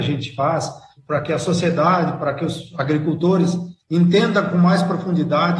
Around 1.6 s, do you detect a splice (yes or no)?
no